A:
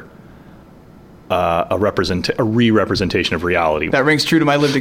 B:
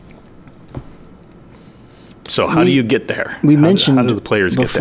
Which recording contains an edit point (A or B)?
A